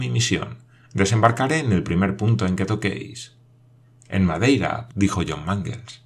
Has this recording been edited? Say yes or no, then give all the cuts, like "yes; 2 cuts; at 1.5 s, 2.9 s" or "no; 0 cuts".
yes; 1 cut; at 4.9 s